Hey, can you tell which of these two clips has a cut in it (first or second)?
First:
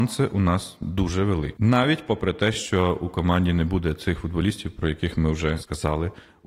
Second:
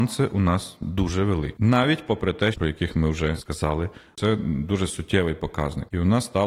second